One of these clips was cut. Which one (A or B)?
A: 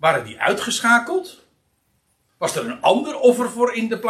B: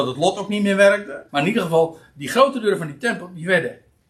B